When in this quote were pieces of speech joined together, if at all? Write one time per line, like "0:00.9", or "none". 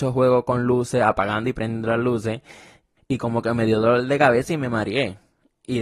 0:03.0